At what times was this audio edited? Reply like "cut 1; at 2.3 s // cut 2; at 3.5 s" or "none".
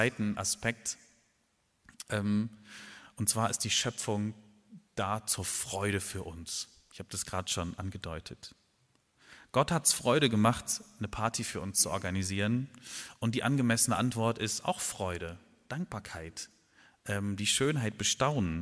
none